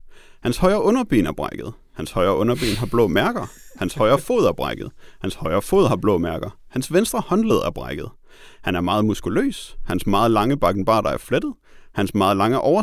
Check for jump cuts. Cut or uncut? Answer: uncut